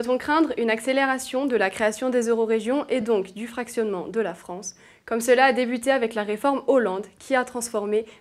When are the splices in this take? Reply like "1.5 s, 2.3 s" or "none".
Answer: none